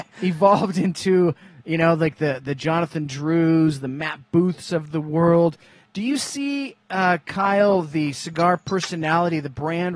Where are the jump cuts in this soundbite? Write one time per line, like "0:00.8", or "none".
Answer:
0:06.8

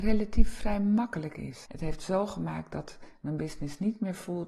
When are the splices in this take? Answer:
0:01.7

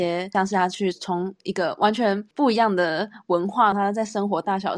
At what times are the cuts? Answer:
0:02.3
0:03.7

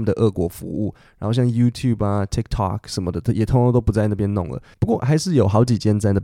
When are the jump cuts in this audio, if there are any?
none

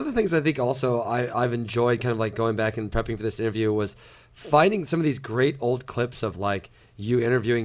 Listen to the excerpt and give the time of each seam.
none

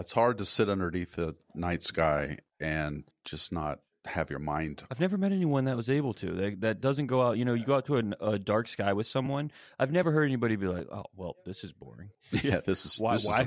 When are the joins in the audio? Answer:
none

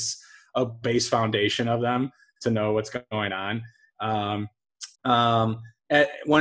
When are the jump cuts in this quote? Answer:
0:04.9

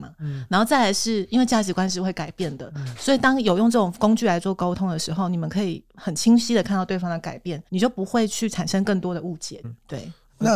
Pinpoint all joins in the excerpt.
0:07.7
0:09.6

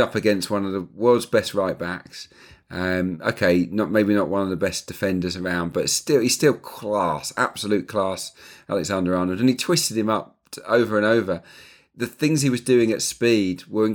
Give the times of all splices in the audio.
none

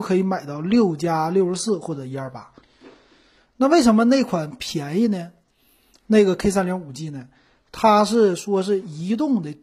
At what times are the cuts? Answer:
none

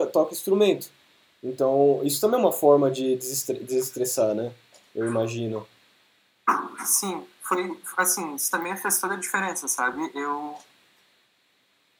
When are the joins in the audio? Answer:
none

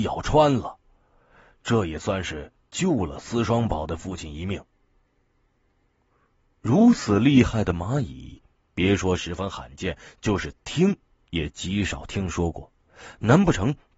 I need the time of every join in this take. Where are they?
none

